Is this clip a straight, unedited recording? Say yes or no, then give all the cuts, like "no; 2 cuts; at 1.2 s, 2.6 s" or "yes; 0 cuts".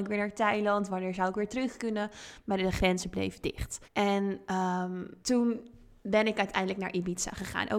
no; 2 cuts; at 3.8 s, 5.2 s